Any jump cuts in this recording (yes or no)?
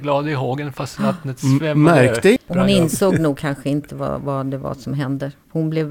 yes